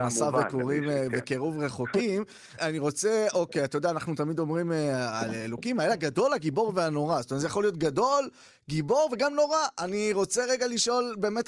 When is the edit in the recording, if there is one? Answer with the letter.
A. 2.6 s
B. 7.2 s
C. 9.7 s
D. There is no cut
A